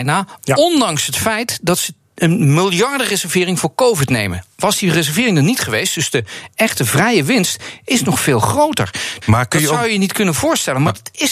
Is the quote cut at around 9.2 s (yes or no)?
yes